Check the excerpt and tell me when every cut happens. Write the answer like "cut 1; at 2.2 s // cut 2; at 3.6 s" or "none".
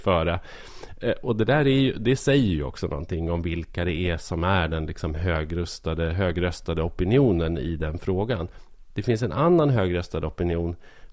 none

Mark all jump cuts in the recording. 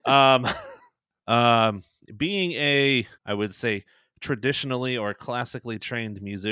cut 1; at 1.2 s // cut 2; at 3.1 s

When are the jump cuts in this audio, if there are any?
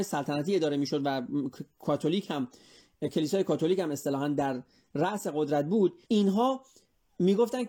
cut 1; at 6.0 s

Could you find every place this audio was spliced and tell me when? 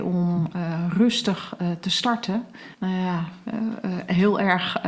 cut 1; at 2.7 s

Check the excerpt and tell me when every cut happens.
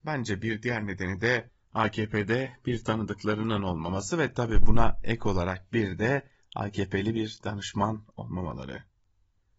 none

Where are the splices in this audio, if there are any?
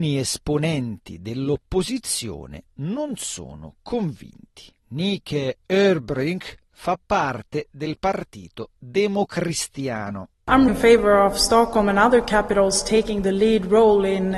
cut 1; at 4.8 s // cut 2; at 10.7 s

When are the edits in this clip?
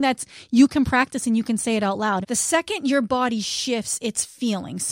cut 1; at 2.2 s

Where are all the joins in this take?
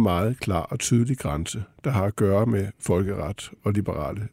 none

